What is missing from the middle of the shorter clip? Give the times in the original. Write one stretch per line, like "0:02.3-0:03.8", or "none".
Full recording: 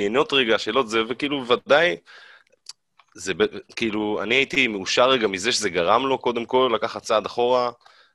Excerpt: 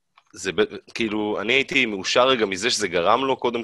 none